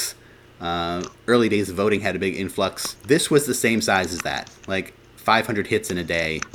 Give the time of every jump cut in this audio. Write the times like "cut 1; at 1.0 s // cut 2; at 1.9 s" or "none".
cut 1; at 3.0 s

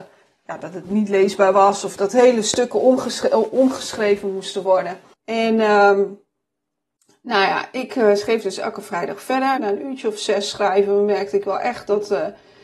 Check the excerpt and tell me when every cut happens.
cut 1; at 5.1 s // cut 2; at 9.6 s

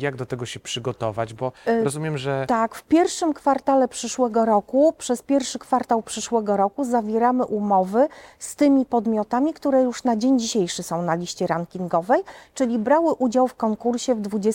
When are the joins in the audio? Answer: none

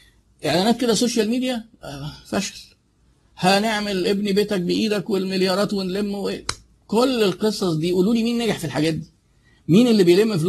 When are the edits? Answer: none

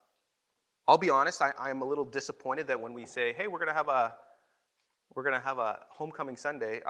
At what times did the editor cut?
none

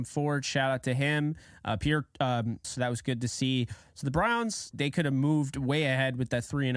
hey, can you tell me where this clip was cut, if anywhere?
cut 1; at 2.6 s // cut 2; at 4.7 s

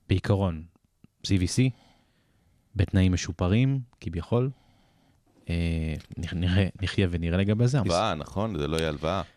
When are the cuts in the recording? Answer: cut 1; at 7.8 s

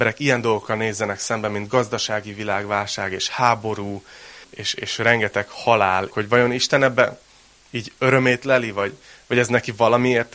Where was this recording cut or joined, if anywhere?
cut 1; at 4.4 s // cut 2; at 6.1 s

